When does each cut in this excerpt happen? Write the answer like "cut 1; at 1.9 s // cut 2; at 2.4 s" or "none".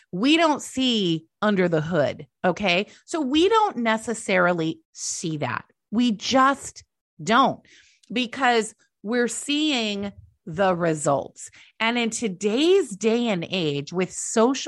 cut 1; at 2.3 s // cut 2; at 4.8 s